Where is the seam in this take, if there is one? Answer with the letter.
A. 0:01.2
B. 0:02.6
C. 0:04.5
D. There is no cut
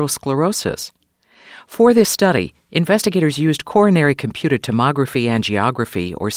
D